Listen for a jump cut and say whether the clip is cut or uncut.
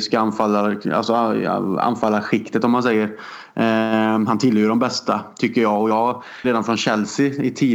cut